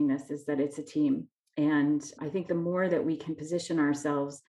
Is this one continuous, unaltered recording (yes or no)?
yes